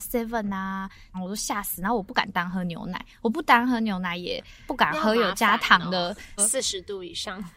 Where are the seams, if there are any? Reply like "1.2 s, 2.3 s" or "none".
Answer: 1.1 s, 6.4 s